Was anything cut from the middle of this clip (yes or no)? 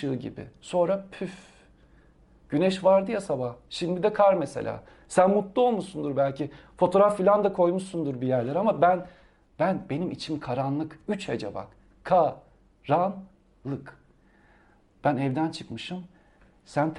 no